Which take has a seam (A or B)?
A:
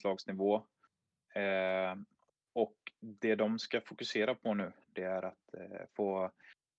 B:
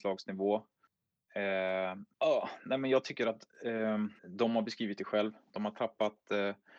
B